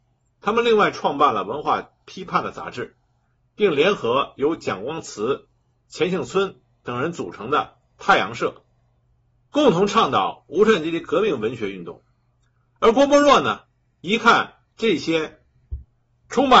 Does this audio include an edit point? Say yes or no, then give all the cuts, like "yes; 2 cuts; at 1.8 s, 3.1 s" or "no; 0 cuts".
no; 0 cuts